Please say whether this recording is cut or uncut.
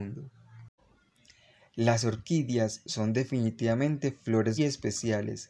cut